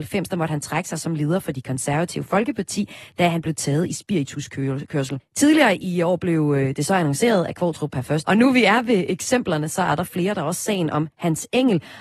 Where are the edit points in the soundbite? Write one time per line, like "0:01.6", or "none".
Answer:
0:05.2
0:08.2